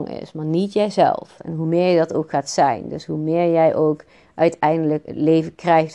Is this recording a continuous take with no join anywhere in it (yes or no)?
no